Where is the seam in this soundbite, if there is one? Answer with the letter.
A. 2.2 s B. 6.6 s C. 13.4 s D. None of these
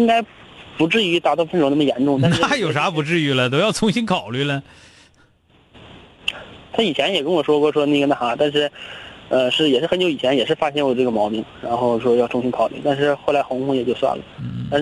D